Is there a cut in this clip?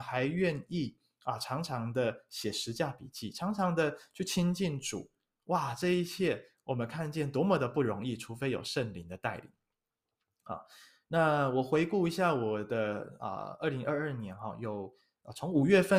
no; 0 cuts

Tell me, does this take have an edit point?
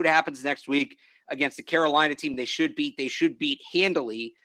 no; 0 cuts

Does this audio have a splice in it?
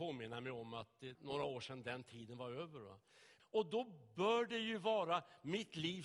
yes; 2 cuts; at 1.1 s, 3.4 s

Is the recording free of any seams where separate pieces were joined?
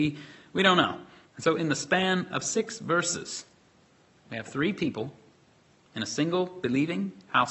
no; 1 cut; at 1.3 s

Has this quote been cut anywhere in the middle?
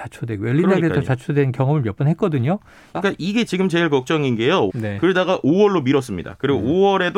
yes; 2 cuts; at 2.9 s, 4.7 s

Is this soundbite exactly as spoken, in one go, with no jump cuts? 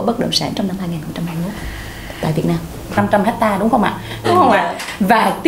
no; 2 cuts; at 3.0 s, 4.2 s

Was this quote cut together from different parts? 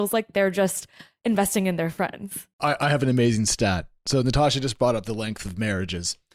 no; 0 cuts

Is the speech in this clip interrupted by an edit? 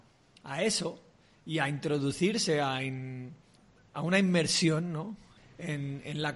no; 0 cuts

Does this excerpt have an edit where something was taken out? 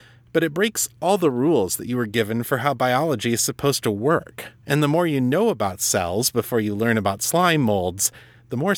no; 0 cuts

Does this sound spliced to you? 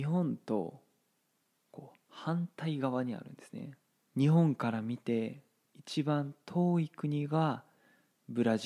yes; 1 cut; at 4.1 s

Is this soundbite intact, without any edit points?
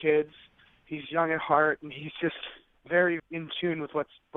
no; 1 cut; at 3.2 s

